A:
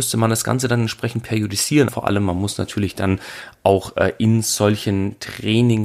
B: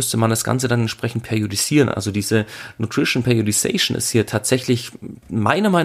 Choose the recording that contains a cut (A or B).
A